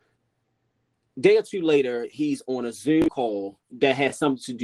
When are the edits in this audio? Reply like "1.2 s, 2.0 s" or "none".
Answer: 3.7 s